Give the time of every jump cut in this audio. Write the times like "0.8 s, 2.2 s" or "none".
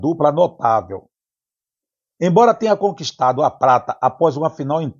none